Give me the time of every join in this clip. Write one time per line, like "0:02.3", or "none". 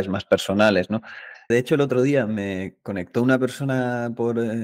0:01.5